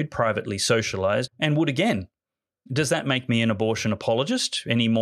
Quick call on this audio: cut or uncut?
cut